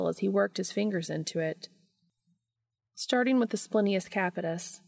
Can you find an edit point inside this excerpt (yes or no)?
no